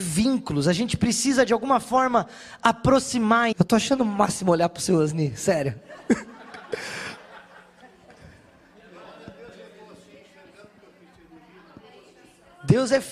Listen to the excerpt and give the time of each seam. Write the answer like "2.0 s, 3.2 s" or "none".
3.5 s